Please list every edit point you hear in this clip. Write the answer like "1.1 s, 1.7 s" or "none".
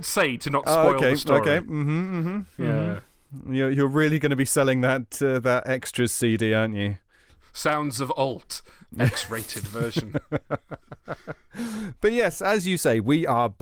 none